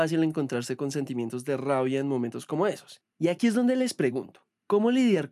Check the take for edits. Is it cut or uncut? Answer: uncut